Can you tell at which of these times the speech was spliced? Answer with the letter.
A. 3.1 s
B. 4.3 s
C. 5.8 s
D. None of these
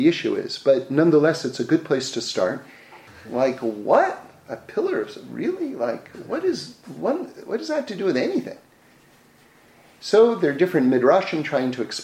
A